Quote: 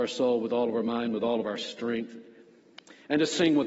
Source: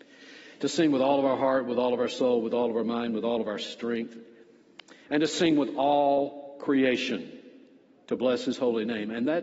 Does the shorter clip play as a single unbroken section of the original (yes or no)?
yes